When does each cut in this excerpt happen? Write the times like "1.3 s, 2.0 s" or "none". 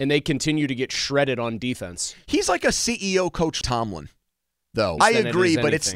3.6 s, 5.0 s